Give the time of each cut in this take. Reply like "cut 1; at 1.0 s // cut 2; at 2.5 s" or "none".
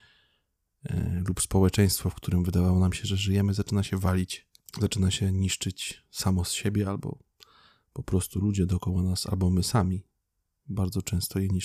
none